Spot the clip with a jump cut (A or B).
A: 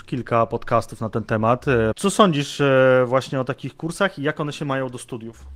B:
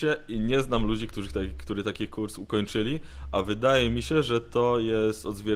A